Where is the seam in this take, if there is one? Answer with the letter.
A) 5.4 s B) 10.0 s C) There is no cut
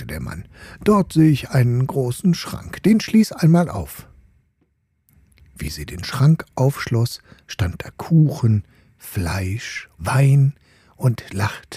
B